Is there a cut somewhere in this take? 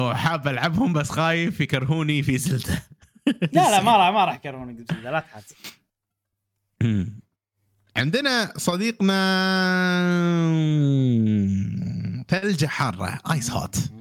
no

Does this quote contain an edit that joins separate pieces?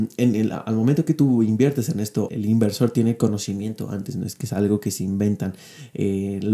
yes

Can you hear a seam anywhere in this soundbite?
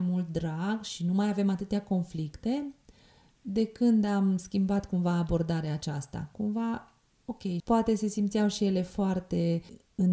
yes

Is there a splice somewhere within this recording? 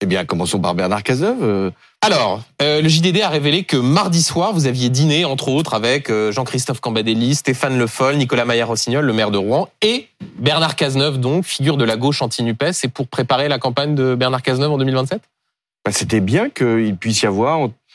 no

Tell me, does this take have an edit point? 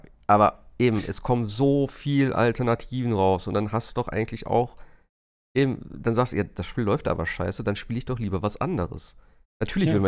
no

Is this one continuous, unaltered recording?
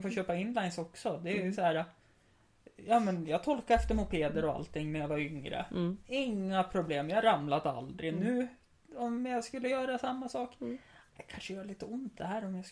yes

